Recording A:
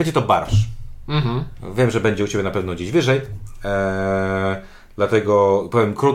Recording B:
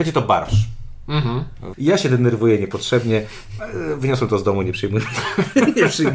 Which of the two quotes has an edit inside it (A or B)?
B